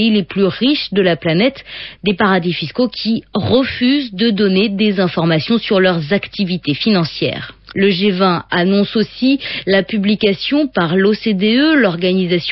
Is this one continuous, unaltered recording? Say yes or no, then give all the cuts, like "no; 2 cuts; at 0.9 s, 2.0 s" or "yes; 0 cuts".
no; 2 cuts; at 2.0 s, 7.7 s